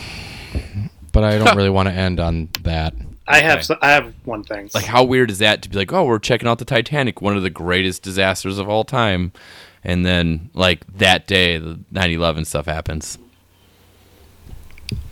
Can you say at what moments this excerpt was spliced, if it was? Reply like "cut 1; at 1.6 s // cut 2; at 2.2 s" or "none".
cut 1; at 1.1 s // cut 2; at 4.7 s